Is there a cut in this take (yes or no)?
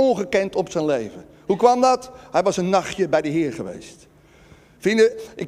no